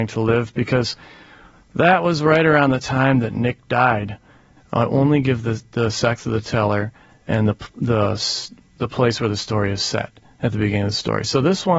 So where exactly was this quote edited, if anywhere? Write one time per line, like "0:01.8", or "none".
0:04.6